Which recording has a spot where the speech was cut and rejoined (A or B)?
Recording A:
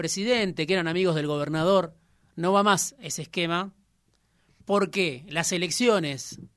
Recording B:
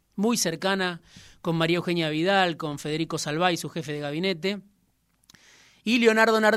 A